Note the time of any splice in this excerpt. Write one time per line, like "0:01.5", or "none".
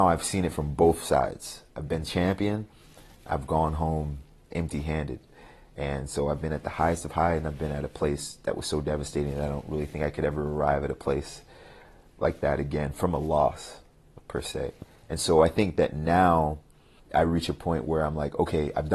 none